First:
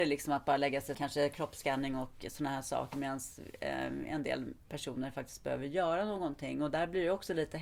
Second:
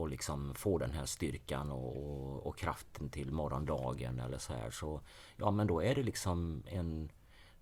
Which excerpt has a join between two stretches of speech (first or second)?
first